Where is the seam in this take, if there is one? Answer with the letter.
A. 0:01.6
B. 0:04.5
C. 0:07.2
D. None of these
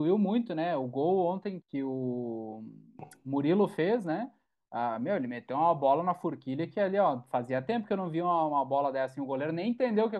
A